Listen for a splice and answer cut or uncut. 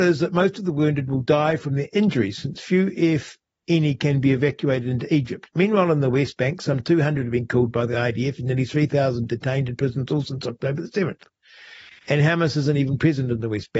uncut